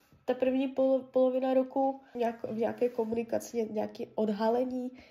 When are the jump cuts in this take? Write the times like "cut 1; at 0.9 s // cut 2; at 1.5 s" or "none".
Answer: cut 1; at 2.2 s

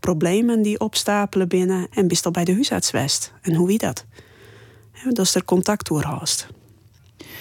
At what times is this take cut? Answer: cut 1; at 1.9 s

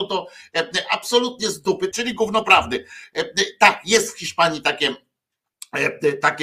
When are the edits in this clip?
cut 1; at 1.9 s

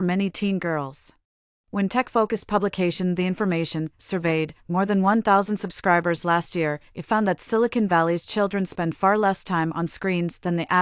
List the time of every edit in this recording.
cut 1; at 1.6 s

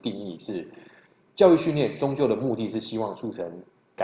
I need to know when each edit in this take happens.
none

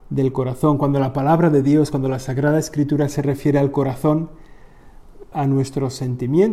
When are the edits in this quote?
cut 1; at 5.3 s

